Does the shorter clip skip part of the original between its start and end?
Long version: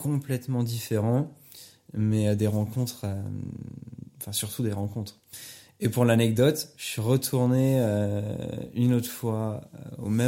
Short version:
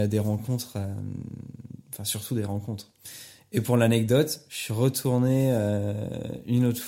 no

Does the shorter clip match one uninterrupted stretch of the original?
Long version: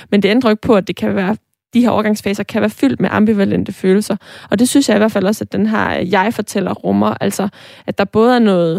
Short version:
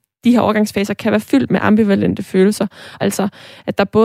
no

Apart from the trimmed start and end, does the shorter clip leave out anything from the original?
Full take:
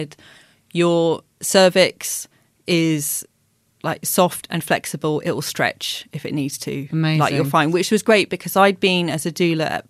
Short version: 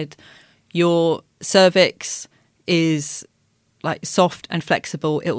no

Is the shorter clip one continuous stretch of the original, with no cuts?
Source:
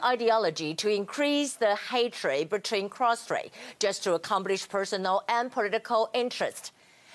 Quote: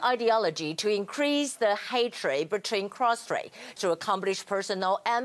no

